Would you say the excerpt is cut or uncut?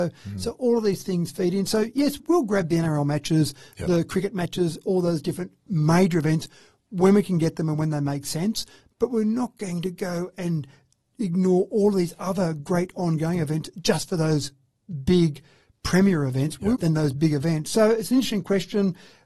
cut